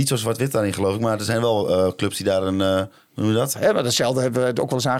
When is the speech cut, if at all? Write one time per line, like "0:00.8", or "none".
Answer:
0:03.5